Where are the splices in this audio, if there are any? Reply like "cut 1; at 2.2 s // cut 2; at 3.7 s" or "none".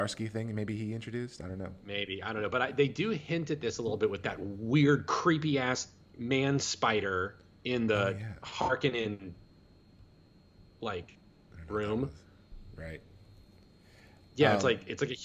none

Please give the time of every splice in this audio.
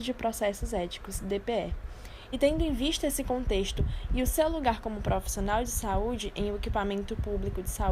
cut 1; at 2.3 s

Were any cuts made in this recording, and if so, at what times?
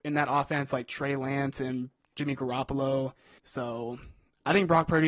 cut 1; at 3.4 s

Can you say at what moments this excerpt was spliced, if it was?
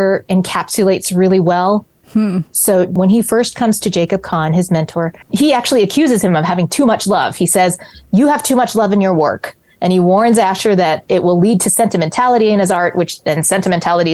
cut 1; at 2.0 s

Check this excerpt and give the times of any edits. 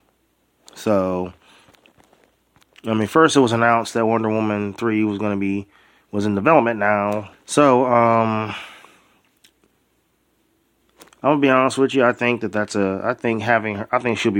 cut 1; at 7.3 s

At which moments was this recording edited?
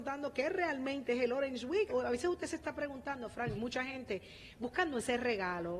cut 1; at 1.9 s // cut 2; at 3.5 s

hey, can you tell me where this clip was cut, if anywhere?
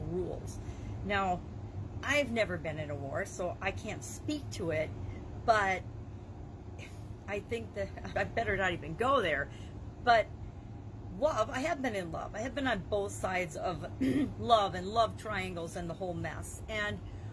cut 1; at 8.1 s

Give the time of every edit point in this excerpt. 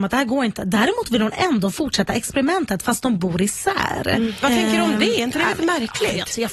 cut 1; at 4.4 s

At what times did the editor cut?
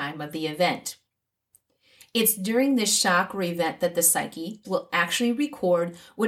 cut 1; at 4.6 s

